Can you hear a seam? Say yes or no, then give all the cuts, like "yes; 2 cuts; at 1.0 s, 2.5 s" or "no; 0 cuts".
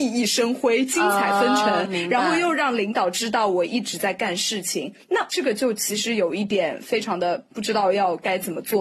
no; 0 cuts